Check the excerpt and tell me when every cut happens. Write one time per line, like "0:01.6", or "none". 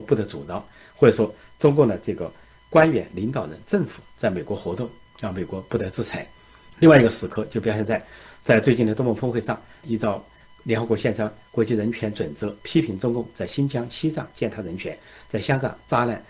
0:06.7
0:09.8